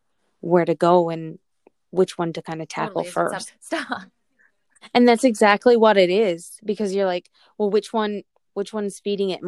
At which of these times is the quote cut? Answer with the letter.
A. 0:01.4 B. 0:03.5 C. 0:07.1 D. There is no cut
B